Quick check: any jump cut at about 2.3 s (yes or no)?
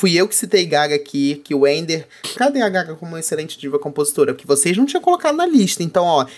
yes